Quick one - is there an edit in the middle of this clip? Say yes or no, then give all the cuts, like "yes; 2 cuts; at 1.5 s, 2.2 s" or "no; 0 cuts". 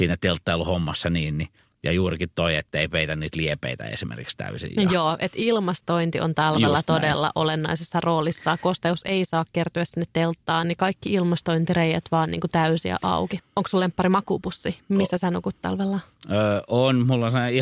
yes; 2 cuts; at 10.6 s, 13.4 s